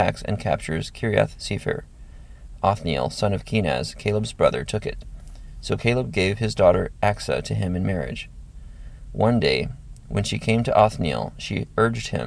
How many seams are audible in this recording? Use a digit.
0